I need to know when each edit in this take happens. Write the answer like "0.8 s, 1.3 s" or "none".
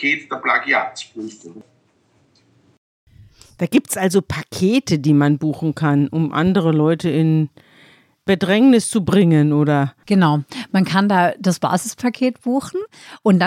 none